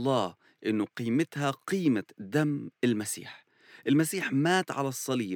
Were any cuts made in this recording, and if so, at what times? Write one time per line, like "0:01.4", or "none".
none